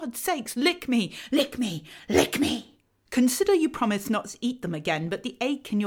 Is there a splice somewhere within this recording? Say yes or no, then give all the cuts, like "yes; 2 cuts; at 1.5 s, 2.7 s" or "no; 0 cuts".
yes; 1 cut; at 3.1 s